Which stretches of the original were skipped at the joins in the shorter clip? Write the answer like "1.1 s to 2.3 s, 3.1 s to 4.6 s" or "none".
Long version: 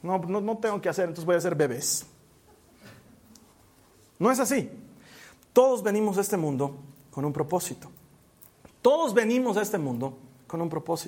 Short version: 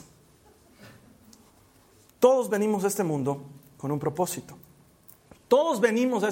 4.1 s to 5.4 s